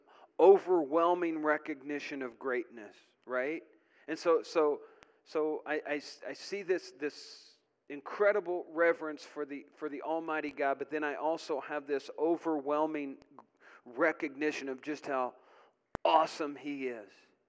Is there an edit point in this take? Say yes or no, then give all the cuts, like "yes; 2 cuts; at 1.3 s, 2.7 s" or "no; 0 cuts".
no; 0 cuts